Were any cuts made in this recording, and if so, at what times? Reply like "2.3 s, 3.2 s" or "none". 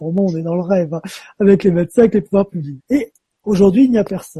2.8 s